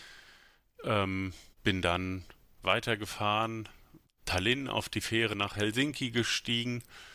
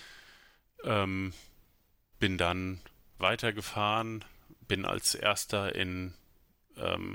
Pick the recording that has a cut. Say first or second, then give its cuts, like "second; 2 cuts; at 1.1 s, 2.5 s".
first; 2 cuts; at 1.5 s, 4.0 s